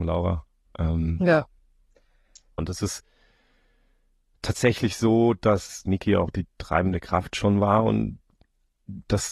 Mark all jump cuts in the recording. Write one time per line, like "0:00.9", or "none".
0:02.6